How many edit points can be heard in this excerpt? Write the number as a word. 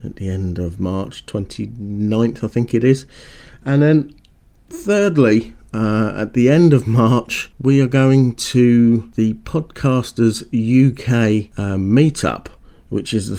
one